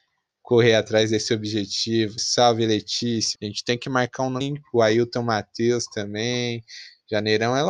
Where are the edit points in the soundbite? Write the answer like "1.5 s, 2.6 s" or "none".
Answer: 2.2 s, 3.3 s, 4.4 s